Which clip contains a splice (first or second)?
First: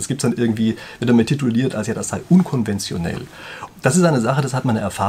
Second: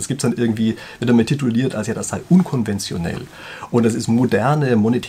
first